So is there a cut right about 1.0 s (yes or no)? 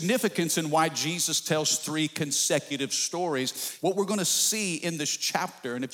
no